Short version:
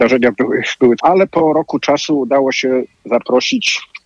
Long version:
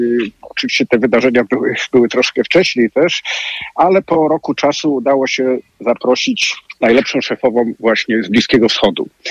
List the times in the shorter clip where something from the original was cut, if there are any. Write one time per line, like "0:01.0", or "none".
0:01.0